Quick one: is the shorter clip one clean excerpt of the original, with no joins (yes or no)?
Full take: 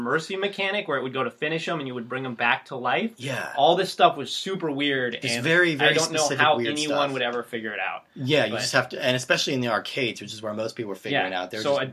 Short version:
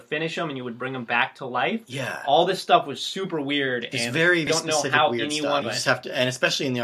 no